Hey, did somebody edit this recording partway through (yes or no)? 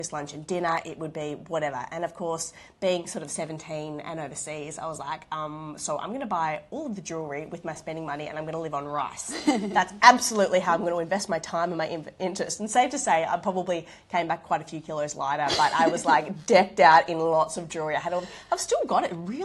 no